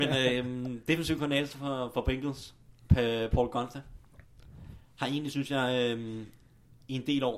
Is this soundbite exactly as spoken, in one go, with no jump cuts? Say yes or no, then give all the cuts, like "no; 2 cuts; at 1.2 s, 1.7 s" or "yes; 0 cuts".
yes; 0 cuts